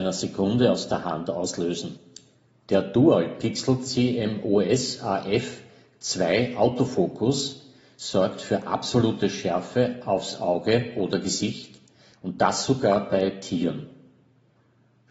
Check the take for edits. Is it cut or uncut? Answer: uncut